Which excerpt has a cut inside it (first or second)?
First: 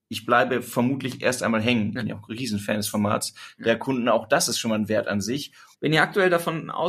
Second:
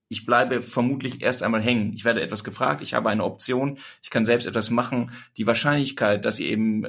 first